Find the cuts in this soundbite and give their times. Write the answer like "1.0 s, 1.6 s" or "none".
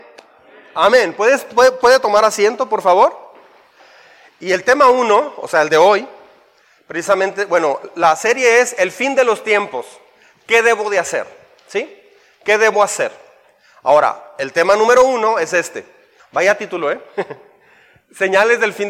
16.2 s